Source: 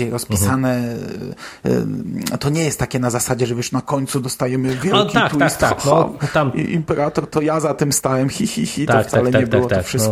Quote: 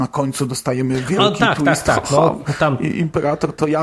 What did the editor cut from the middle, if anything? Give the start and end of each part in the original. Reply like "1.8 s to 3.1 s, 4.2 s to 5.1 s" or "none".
none